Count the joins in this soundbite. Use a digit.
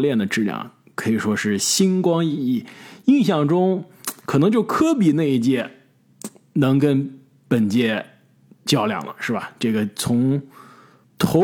0